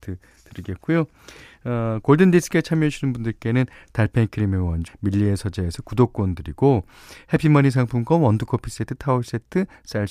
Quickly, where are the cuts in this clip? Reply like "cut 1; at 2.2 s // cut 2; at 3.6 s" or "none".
cut 1; at 4.9 s